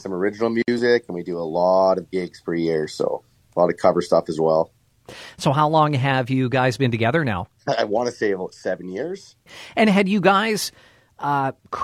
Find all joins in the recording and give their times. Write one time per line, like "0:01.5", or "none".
none